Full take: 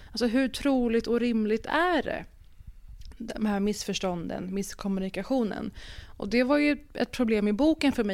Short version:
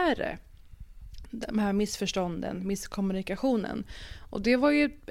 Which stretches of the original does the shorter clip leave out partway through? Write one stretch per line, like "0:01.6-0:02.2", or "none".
none